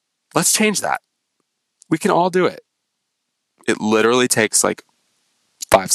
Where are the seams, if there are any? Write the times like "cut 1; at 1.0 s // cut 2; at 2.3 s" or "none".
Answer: cut 1; at 3.5 s